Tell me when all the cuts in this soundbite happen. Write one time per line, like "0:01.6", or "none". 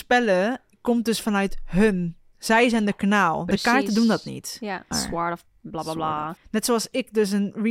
0:04.9
0:06.4

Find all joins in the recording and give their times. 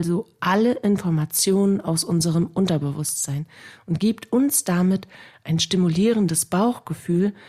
none

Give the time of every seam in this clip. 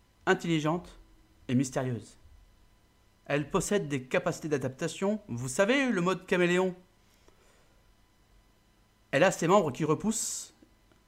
none

